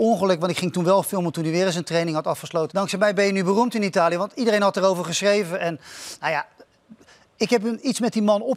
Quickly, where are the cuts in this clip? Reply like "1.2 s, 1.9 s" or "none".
2.7 s